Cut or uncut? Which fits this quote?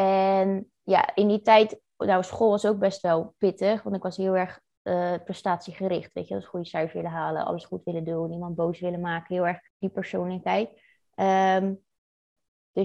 cut